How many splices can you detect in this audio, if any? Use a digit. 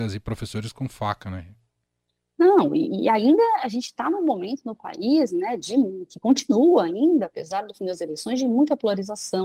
0